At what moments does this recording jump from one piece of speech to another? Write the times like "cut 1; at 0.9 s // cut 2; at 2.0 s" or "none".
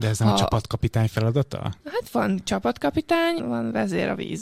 cut 1; at 1.8 s // cut 2; at 3.4 s